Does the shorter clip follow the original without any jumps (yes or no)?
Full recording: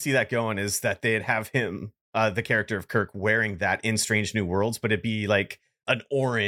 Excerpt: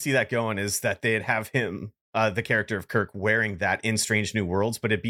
yes